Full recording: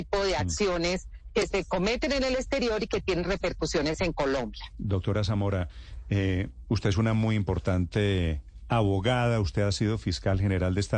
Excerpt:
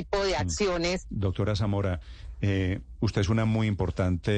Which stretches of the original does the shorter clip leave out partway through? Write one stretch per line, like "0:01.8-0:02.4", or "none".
0:01.0-0:04.7